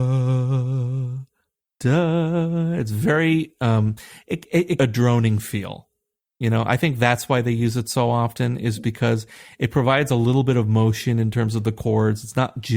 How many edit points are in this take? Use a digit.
1